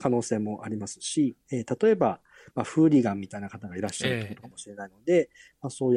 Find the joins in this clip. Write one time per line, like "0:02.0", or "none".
0:01.4
0:04.4

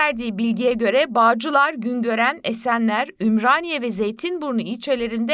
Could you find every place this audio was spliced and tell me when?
none

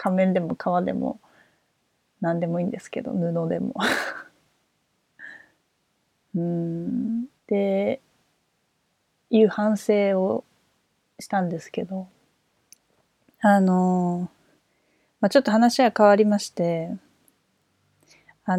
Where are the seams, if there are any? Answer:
0:07.4

